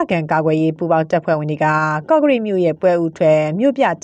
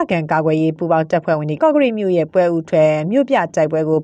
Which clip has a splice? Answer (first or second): second